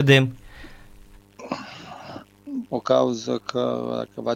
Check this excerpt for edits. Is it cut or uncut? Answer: cut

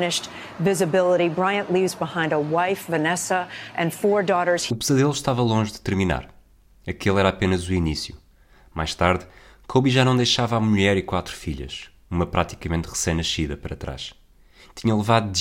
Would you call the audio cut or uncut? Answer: uncut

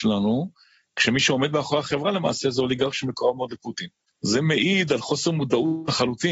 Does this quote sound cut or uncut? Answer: uncut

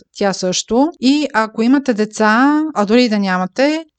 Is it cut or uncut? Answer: cut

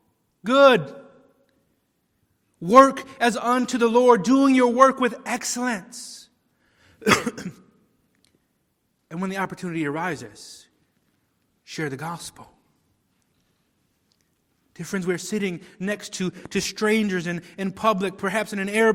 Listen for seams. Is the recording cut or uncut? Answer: uncut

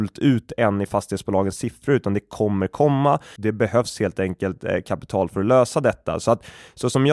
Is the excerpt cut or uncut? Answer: cut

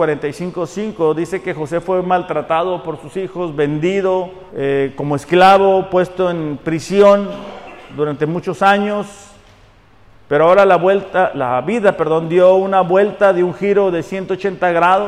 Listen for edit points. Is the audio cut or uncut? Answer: cut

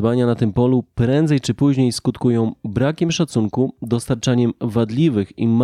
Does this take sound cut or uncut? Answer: uncut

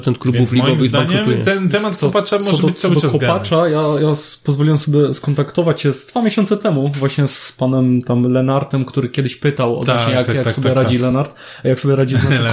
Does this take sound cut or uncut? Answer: uncut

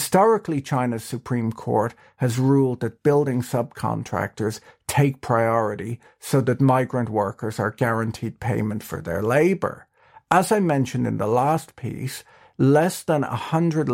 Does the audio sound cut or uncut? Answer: uncut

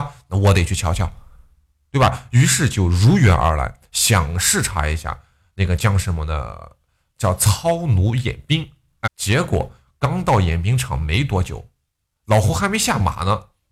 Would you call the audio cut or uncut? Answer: cut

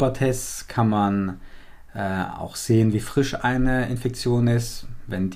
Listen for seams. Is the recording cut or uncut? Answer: uncut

